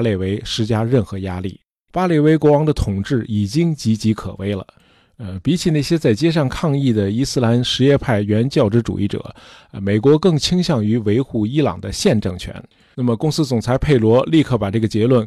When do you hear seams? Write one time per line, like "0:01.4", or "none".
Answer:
0:12.9